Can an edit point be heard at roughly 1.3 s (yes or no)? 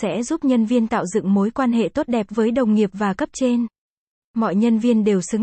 no